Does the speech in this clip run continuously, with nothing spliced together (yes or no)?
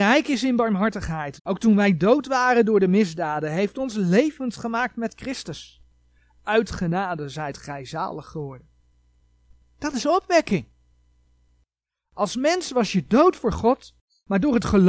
no